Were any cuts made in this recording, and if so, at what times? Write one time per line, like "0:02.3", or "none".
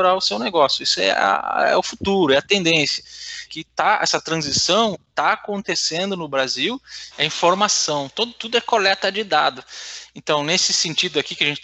0:03.5
0:07.1